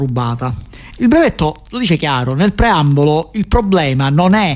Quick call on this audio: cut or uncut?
cut